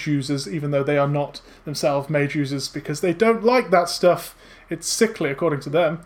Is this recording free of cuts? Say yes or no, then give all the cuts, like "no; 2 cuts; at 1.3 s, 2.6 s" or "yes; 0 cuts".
yes; 0 cuts